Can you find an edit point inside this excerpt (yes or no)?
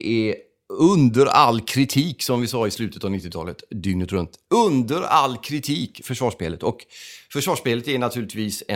no